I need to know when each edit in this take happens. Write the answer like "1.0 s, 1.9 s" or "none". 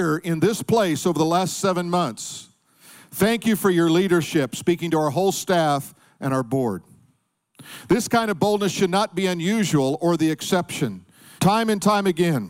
11.4 s